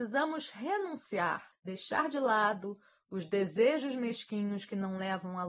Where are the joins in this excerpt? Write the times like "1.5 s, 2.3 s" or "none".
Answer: 1.5 s